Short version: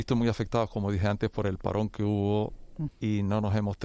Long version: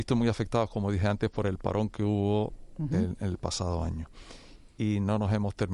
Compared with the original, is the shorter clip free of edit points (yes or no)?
no